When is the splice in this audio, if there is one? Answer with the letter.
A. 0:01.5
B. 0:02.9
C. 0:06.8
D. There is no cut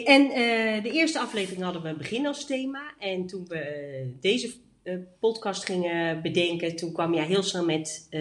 D